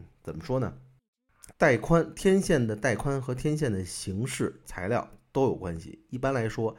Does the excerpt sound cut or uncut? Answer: cut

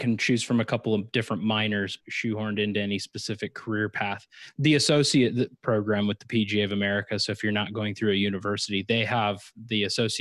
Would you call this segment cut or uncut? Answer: cut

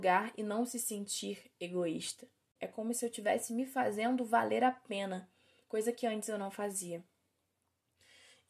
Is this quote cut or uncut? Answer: cut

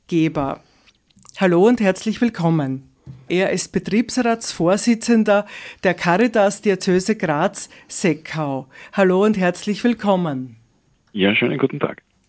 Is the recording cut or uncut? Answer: cut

